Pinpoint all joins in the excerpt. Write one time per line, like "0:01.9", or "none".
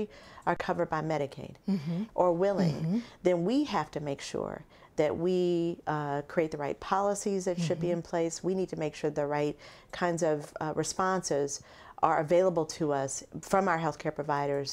0:02.1